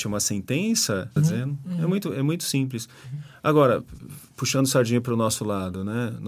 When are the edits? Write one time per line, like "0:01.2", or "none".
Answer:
0:01.2

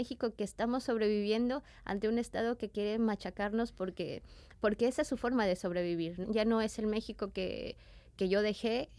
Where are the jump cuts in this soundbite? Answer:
0:06.2

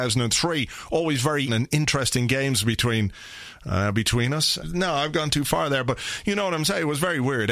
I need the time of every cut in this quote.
0:01.5
0:04.6

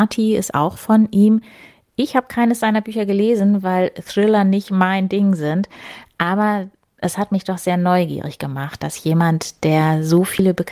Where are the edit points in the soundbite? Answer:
none

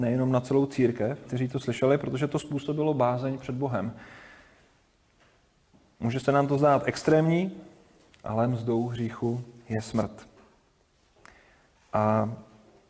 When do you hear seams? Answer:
0:01.2

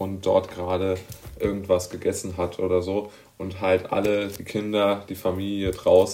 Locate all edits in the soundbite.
none

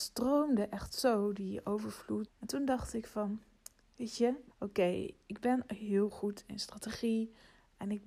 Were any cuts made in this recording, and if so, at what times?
0:02.3
0:04.5

